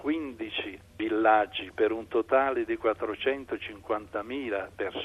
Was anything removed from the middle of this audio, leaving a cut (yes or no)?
no